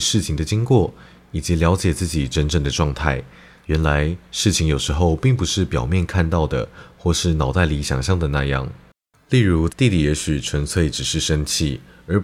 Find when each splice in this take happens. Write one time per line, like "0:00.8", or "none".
0:03.6
0:09.7

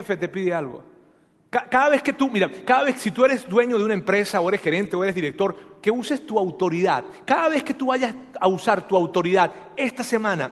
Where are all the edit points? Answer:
none

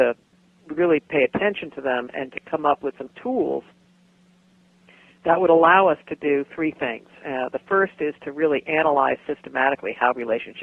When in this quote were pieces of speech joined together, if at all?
none

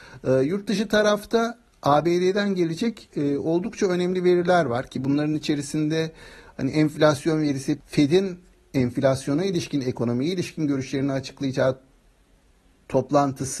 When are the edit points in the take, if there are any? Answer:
0:07.8

